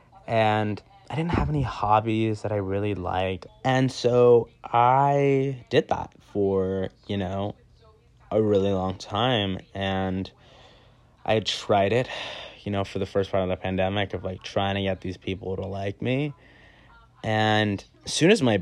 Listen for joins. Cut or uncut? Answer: cut